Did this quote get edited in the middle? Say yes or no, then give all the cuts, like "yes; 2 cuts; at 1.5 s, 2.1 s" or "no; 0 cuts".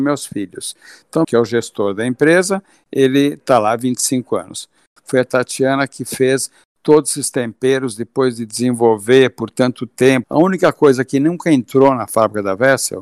yes; 3 cuts; at 1.2 s, 5.0 s, 10.2 s